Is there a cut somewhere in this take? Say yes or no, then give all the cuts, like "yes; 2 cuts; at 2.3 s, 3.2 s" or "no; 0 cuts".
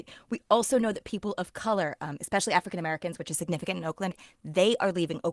no; 0 cuts